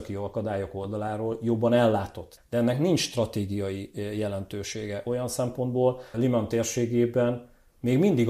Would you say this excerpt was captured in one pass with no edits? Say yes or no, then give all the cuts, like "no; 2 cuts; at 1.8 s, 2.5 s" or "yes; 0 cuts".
no; 2 cuts; at 2.4 s, 6.1 s